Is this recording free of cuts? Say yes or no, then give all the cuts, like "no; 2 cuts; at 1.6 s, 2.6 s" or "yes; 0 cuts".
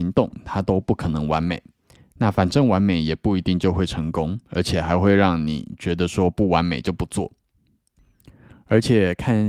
yes; 0 cuts